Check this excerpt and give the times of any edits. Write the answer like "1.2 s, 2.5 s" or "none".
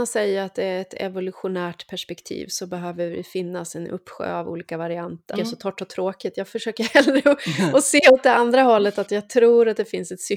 5.3 s